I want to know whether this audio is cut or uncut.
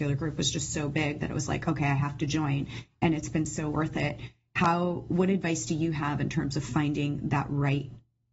uncut